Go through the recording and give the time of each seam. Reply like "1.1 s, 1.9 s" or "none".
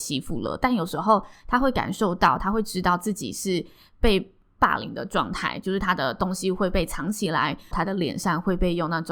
7.7 s